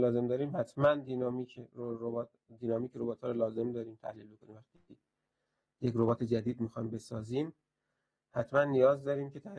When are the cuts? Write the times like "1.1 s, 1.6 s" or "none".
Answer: none